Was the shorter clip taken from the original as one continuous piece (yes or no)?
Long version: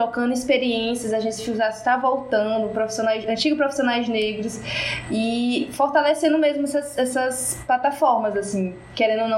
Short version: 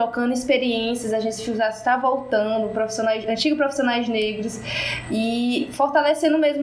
yes